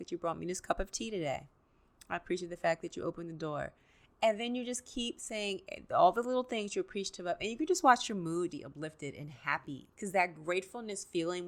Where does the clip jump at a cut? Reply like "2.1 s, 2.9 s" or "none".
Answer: 8.5 s, 9.9 s

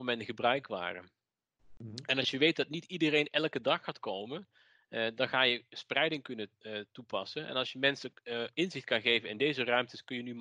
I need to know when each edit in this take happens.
none

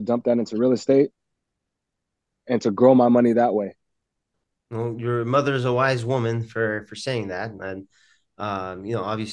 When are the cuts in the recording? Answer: none

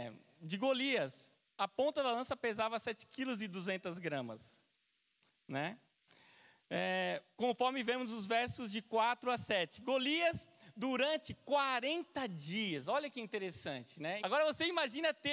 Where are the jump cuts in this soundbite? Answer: 14.2 s

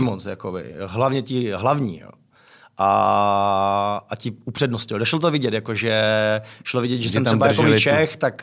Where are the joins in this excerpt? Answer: none

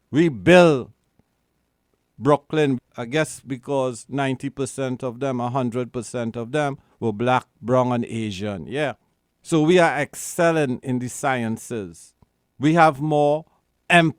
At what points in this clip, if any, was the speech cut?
2.8 s, 12.5 s

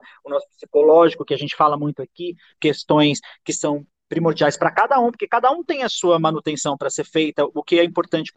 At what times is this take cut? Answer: 2.6 s

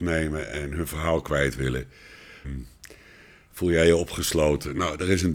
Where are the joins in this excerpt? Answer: 2.4 s

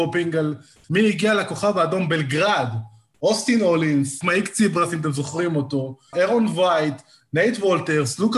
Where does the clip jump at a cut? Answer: 4.2 s, 6.1 s

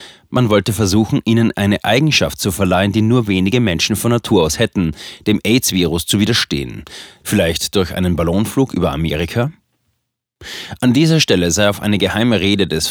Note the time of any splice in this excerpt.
5.2 s, 7.2 s

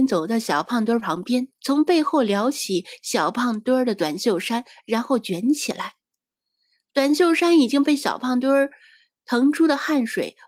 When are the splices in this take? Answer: 1.6 s

